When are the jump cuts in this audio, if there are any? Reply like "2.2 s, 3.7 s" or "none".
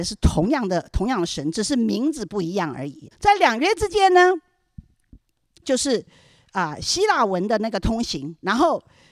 3.1 s, 5.6 s

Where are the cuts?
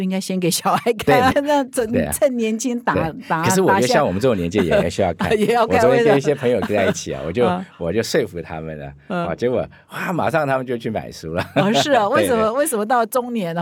1.3 s

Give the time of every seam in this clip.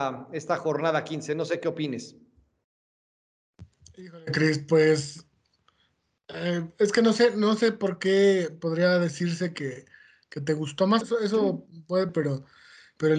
11.0 s, 12.1 s

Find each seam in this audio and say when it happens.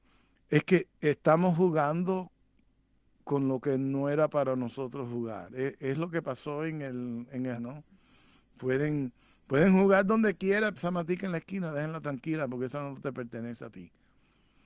7.6 s, 10.8 s

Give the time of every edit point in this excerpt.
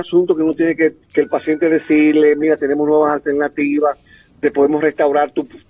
1.0 s, 4.3 s

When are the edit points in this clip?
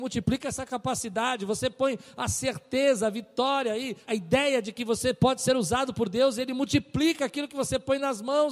4.1 s

